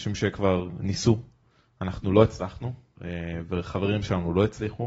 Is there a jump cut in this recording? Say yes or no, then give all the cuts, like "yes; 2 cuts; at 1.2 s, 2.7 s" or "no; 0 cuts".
no; 0 cuts